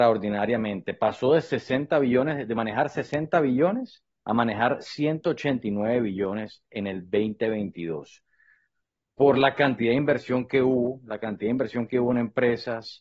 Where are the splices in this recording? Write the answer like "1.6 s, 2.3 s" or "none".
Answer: none